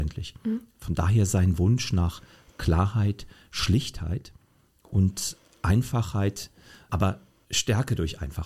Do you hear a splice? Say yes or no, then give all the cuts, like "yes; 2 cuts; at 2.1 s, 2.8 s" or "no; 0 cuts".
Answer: no; 0 cuts